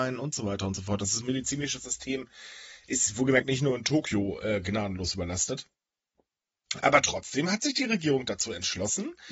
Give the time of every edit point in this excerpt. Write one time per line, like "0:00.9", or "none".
none